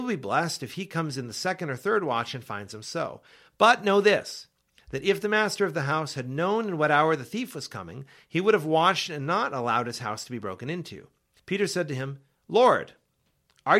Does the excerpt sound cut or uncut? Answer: cut